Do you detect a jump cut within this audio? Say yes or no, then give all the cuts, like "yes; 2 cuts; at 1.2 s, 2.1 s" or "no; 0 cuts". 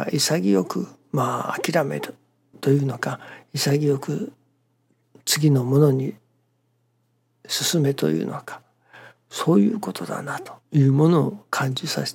yes; 1 cut; at 10.6 s